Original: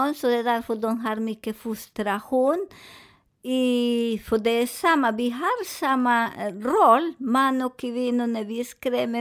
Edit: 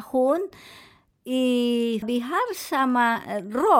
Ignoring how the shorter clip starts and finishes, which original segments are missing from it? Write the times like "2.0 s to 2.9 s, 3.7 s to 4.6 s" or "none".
4.2 s to 5.1 s